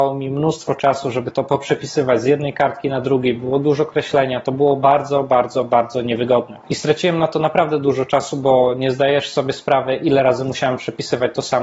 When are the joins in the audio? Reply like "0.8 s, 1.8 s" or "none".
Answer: none